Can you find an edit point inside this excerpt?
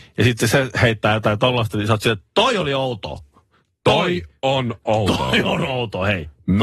no; 0 cuts

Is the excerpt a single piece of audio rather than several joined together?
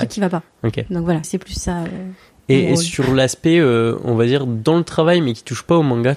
no; 1 cut; at 1.2 s

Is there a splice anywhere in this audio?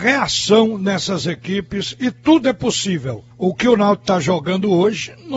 yes; 1 cut; at 3.3 s

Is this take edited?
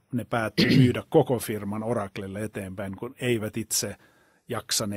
no; 0 cuts

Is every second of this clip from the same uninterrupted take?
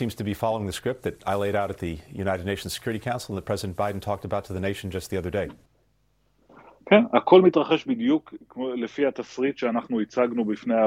yes; 0 cuts

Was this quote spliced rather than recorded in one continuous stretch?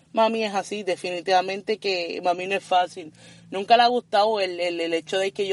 no; 0 cuts

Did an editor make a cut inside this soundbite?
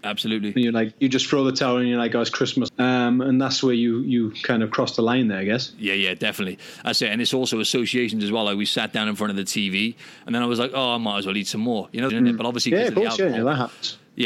yes; 2 cuts; at 2.7 s, 12.1 s

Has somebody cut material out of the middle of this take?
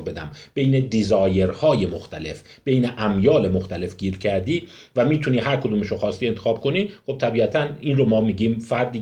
no; 0 cuts

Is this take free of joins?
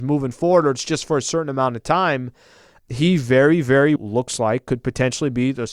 no; 2 cuts; at 2.8 s, 4.0 s

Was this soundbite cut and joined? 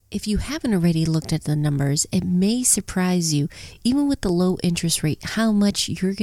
no; 0 cuts

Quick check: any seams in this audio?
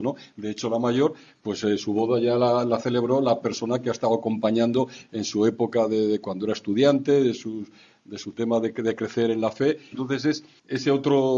yes; 1 cut; at 9.9 s

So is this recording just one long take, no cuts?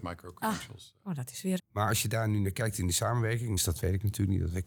no; 2 cuts; at 1.6 s, 3.6 s

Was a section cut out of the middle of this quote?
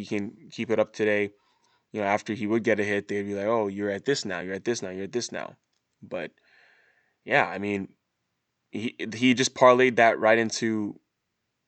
no; 0 cuts

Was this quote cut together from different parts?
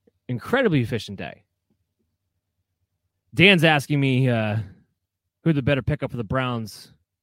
no; 0 cuts

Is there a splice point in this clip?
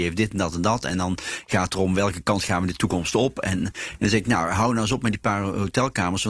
no; 0 cuts

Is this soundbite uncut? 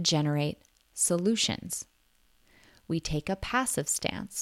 yes; 0 cuts

